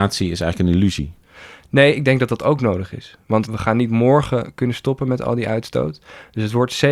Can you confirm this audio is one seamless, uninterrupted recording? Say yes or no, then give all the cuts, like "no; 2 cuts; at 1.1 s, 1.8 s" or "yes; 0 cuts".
yes; 0 cuts